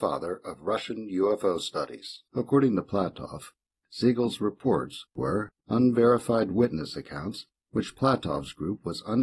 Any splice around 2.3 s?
yes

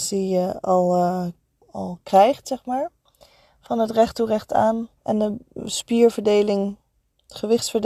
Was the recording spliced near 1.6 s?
yes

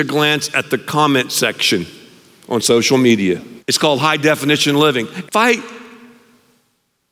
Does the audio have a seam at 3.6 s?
yes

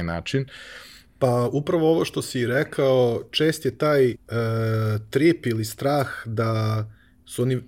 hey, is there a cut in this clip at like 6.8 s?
no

